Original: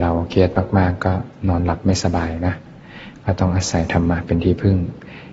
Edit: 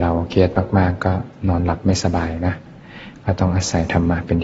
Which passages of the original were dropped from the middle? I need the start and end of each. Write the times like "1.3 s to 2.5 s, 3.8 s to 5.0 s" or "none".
none